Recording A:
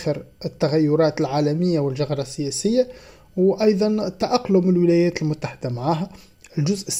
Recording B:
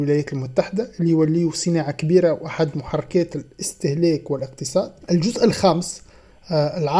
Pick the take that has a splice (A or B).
B